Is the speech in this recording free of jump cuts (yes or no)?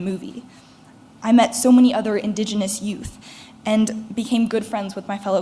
no